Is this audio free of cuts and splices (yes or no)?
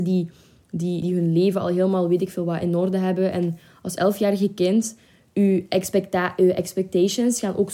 no